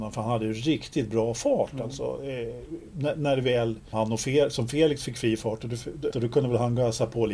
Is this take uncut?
no; 2 cuts; at 3.9 s, 6.1 s

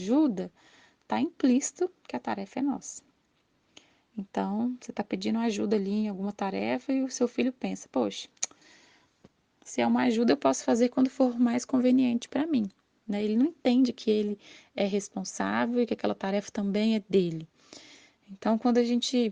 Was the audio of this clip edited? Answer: no; 0 cuts

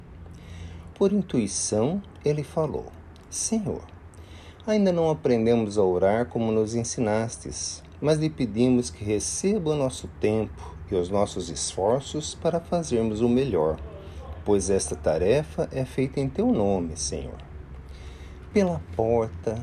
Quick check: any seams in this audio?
yes; 2 cuts; at 0.9 s, 18.5 s

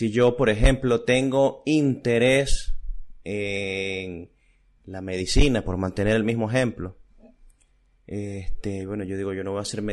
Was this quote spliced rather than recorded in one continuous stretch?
no; 0 cuts

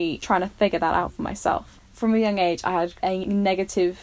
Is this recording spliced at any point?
yes; 1 cut; at 3.0 s

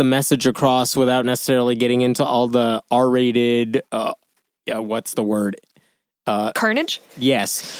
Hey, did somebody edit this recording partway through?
no; 0 cuts

